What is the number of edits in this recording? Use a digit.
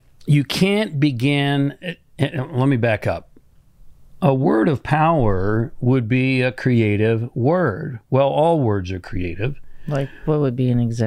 0